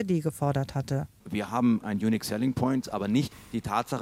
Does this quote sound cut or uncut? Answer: cut